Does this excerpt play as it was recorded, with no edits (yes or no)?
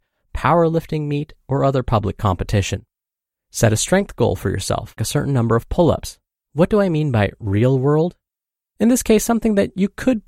no